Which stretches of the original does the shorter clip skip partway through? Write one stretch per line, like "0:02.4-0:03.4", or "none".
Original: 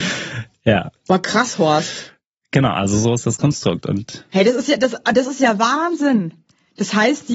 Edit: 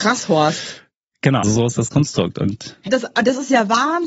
0:02.7-0:02.9
0:04.3-0:04.8